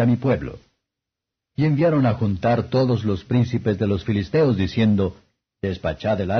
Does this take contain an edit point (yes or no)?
no